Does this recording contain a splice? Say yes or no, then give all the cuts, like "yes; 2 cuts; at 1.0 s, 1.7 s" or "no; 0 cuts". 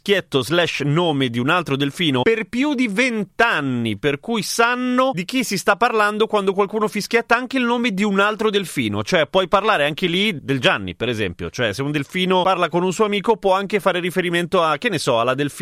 yes; 1 cut; at 10.4 s